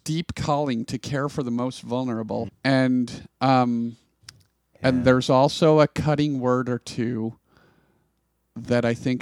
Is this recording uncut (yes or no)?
no